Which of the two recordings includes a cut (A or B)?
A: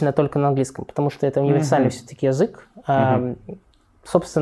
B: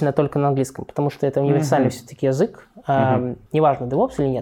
B